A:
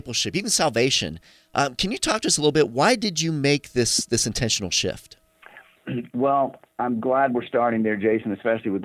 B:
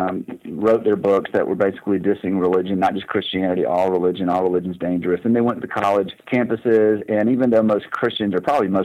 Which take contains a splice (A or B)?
B